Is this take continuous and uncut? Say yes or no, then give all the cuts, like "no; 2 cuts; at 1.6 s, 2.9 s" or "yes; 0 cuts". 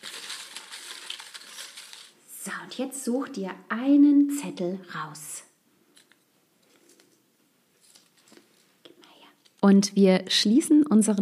no; 1 cut; at 9.6 s